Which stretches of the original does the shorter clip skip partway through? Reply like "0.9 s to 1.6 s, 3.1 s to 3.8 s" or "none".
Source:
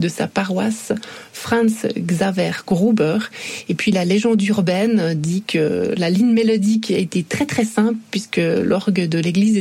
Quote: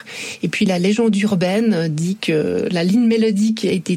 none